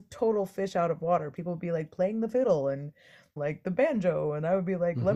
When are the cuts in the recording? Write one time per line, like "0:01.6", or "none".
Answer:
0:03.4